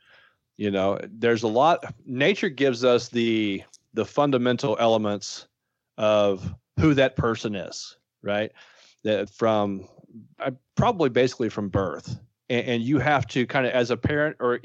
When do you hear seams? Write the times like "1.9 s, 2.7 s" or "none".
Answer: 9.3 s